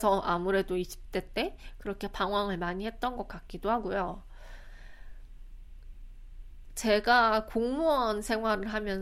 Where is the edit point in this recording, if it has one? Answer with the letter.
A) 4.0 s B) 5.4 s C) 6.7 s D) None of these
D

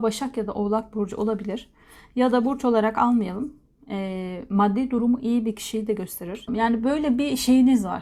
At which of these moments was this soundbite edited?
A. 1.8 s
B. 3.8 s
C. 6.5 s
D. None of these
C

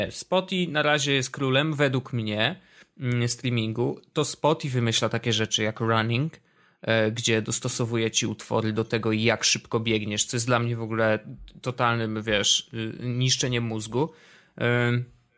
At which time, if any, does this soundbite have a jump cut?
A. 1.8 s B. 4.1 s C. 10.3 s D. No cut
D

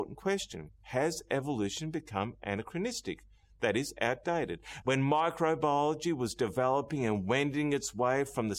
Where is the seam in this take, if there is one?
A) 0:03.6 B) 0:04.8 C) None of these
B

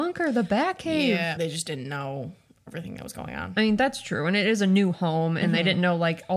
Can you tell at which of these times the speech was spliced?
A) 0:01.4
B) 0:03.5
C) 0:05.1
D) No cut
A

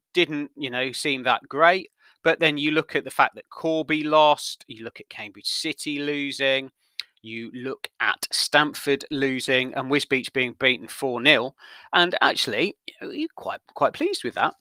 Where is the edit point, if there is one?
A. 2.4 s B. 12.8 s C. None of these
B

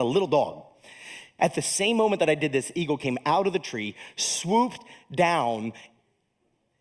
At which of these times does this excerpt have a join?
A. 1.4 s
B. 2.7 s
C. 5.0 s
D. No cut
A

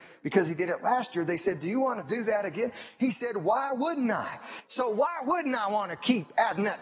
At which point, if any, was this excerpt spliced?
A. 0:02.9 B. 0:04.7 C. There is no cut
B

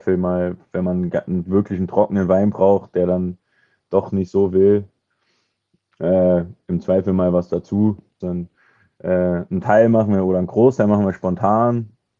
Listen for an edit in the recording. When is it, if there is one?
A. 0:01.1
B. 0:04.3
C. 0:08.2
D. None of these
C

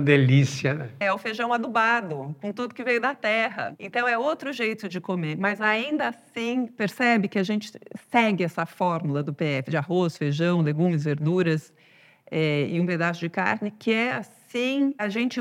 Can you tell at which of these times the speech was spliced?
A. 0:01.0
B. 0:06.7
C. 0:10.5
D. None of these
A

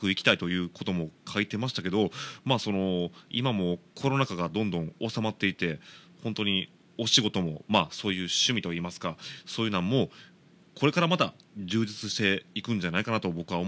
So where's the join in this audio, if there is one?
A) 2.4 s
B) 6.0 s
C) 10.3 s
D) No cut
D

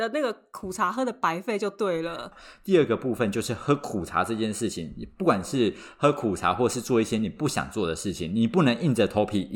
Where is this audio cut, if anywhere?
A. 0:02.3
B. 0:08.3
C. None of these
A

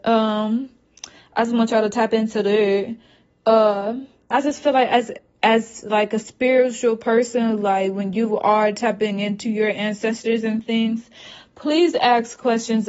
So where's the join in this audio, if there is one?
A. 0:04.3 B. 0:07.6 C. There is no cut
A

